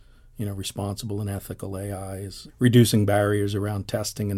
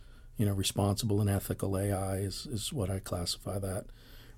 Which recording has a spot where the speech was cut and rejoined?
first; 1 cut; at 2.5 s

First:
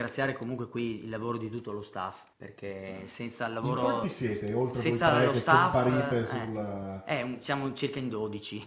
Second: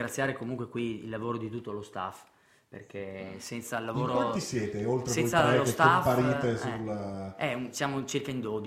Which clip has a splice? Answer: first; 1 cut; at 2.3 s

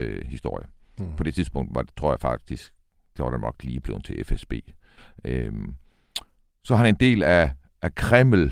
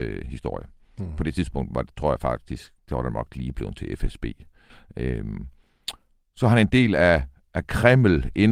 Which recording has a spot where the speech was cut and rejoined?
second; 1 cut; at 2.8 s

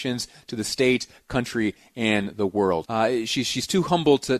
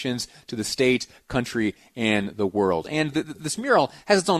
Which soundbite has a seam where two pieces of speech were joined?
first; 1 cut; at 2.8 s

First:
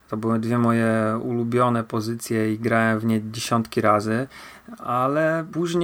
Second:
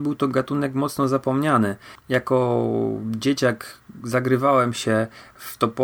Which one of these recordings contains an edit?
second; 1 cut; at 2.0 s

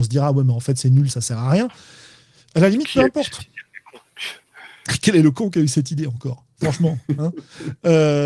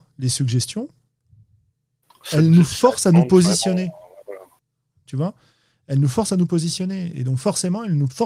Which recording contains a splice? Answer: first; 1 cut; at 1.1 s

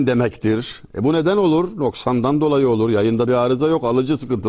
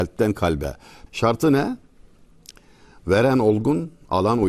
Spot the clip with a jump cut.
second; 1 cut; at 1.1 s

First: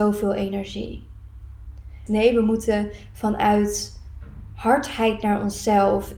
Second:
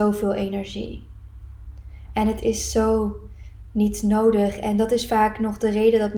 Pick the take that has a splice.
first; 1 cut; at 2.1 s

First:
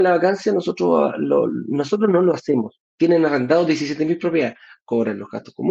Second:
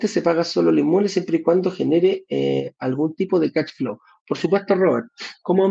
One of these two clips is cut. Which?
first; 1 cut; at 2.8 s

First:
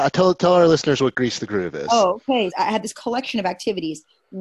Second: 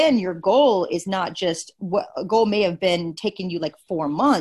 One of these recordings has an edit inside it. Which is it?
first; 1 cut; at 2.5 s

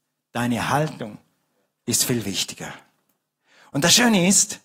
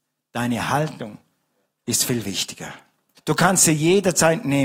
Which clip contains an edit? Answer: second; 1 cut; at 3.2 s

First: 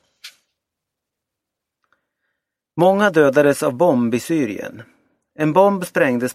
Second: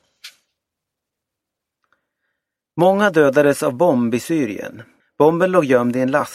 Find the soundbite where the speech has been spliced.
second; 1 cut; at 5.0 s

